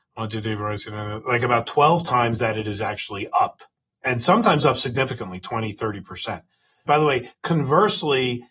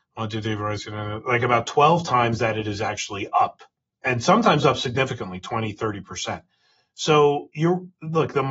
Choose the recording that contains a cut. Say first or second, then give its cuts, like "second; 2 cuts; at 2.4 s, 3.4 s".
first; 1 cut; at 6.9 s